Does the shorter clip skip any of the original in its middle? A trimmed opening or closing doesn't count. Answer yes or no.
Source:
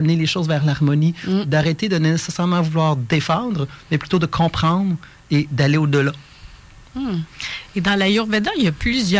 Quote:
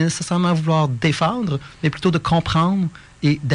no